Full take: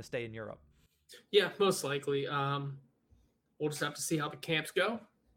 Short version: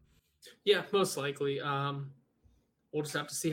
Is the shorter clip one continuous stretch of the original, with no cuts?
yes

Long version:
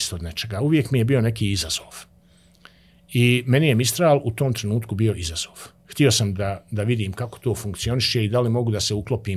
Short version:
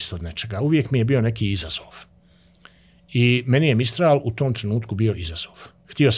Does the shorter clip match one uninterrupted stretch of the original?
yes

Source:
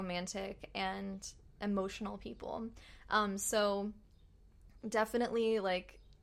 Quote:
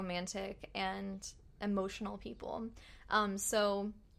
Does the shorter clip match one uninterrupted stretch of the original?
yes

